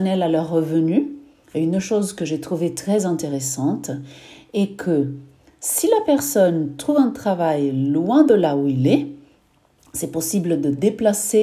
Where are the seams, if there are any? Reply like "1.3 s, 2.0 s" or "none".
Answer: none